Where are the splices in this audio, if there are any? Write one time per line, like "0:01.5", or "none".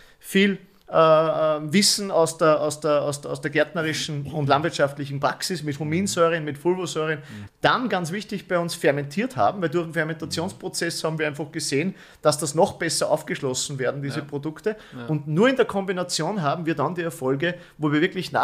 0:07.5